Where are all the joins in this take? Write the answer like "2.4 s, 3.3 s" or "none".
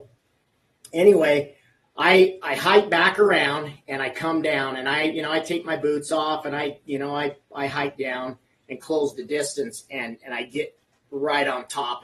none